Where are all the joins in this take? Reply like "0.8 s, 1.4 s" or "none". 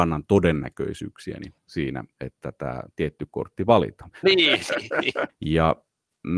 4.2 s, 5.3 s